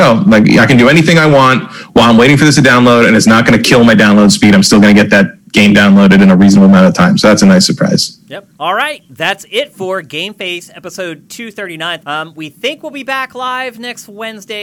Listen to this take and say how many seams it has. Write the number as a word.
two